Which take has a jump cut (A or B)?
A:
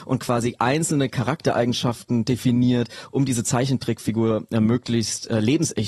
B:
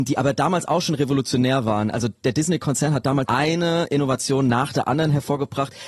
B